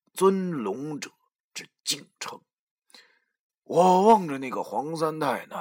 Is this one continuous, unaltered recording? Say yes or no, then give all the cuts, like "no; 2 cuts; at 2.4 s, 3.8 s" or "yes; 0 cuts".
no; 1 cut; at 3.5 s